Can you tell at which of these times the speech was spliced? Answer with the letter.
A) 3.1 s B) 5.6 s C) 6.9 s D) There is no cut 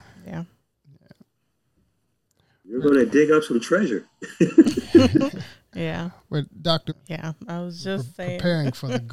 C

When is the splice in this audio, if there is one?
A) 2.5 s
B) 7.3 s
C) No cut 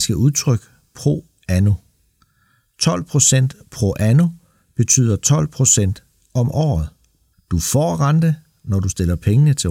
B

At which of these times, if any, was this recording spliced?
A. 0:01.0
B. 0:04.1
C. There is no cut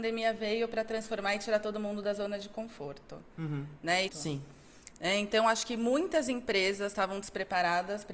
B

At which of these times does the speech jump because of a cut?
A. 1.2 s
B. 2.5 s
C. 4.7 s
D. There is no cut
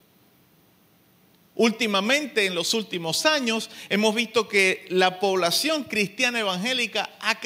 D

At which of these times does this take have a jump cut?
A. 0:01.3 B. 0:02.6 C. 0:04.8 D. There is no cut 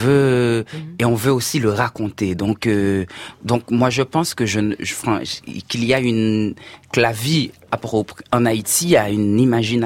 C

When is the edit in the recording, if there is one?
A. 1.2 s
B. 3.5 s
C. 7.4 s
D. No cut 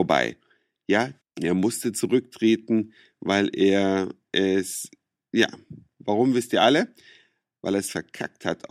A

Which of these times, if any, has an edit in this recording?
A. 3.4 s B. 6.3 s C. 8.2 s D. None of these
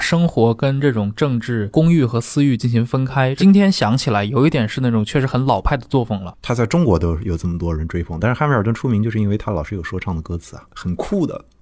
B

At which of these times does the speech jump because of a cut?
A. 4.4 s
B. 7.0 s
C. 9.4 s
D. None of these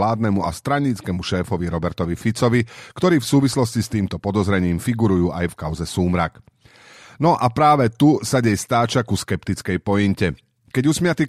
D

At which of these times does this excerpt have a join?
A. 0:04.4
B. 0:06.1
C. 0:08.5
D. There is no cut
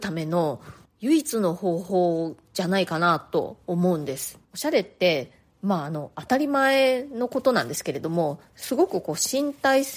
A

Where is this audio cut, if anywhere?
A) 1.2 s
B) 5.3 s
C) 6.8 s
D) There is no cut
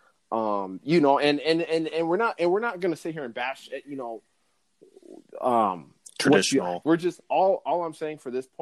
C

